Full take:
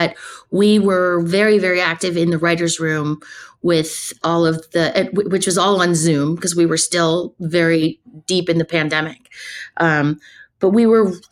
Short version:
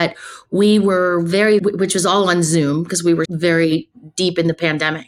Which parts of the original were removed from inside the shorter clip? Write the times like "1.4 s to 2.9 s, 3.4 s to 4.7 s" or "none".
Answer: 1.6 s to 5.1 s, 6.8 s to 7.4 s